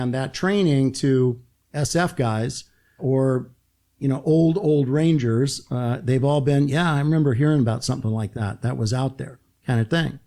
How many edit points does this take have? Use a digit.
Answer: 1